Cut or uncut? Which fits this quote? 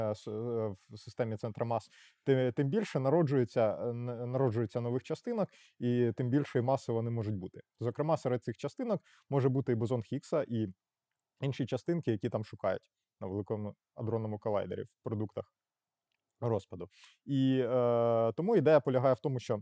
uncut